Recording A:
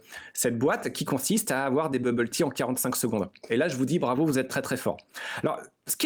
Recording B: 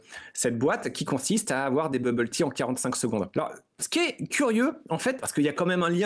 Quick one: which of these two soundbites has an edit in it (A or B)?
B